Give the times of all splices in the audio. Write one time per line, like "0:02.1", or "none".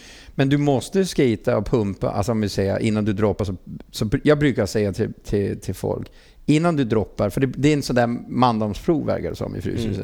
none